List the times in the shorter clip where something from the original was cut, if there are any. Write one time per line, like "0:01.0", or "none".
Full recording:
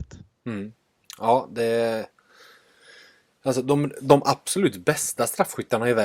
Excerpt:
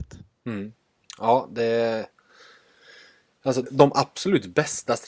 0:03.6